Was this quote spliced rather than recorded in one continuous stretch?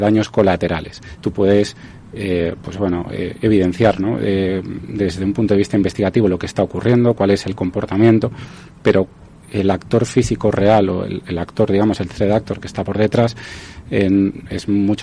yes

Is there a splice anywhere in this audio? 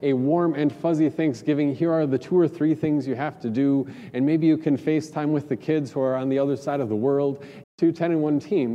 yes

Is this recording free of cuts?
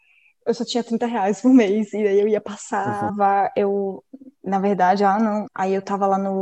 no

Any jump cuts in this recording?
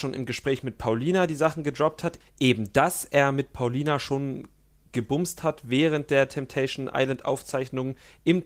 no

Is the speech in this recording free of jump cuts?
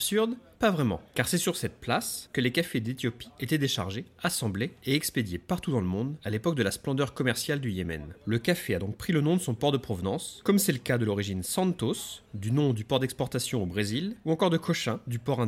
yes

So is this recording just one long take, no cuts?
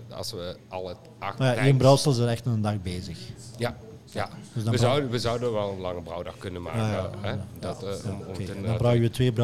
yes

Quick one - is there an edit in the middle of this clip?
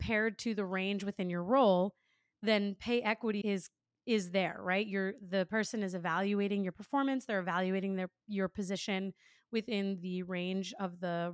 yes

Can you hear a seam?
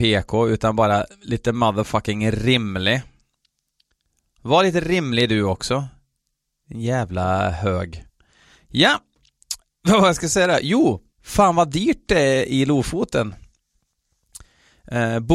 yes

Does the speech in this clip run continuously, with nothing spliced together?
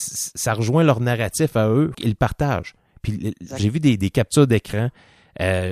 no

